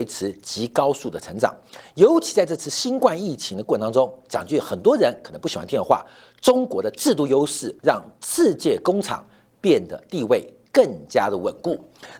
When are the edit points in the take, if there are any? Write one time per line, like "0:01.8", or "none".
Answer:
0:07.8